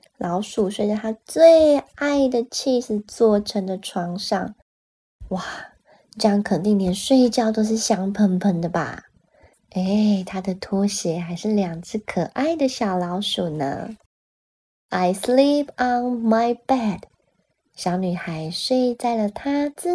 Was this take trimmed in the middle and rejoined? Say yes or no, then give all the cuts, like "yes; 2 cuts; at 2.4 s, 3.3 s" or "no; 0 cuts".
no; 0 cuts